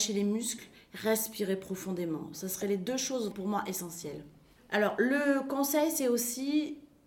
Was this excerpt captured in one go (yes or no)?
no